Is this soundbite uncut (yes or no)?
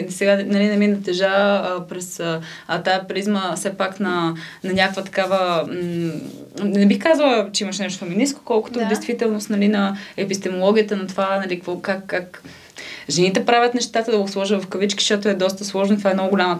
yes